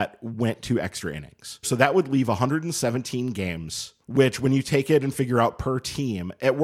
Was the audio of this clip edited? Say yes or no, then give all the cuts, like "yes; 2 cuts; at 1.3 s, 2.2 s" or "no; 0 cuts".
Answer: yes; 2 cuts; at 1.6 s, 4.0 s